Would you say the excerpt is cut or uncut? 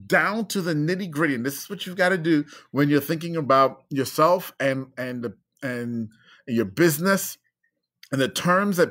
uncut